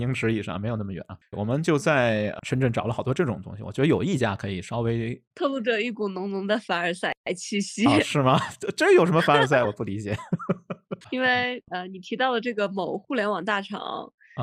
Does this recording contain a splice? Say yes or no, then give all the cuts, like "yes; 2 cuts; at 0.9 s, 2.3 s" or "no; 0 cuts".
yes; 1 cut; at 5.3 s